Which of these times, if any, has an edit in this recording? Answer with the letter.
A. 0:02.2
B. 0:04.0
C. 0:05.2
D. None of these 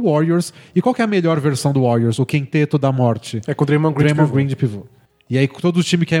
D